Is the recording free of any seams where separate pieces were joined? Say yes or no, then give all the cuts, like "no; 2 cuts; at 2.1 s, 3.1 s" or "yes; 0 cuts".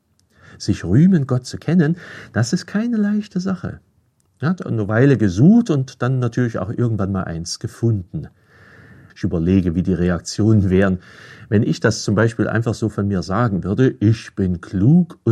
no; 2 cuts; at 4.2 s, 9.1 s